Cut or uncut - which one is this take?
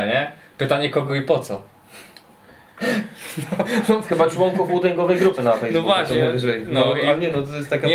uncut